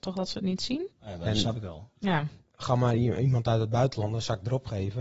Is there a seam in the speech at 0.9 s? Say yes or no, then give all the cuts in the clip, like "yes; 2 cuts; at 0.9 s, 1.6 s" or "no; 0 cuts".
yes; 1 cut; at 0.9 s